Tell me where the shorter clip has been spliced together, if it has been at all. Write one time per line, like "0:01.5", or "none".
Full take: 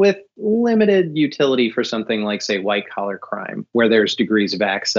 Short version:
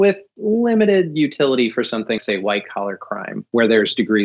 0:02.2